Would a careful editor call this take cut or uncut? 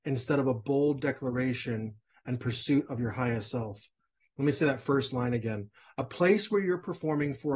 uncut